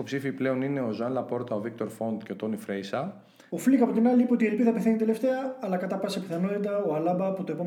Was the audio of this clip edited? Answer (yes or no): yes